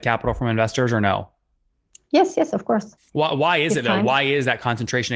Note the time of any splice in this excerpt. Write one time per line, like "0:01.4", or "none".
0:03.0